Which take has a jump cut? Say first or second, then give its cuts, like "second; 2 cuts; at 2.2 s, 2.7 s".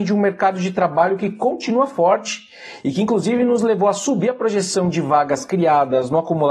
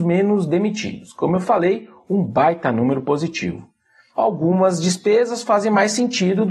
second; 1 cut; at 4.1 s